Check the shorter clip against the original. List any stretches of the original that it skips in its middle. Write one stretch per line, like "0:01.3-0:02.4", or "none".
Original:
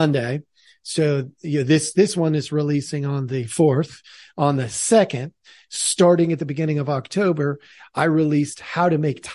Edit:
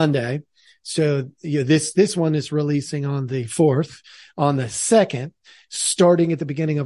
none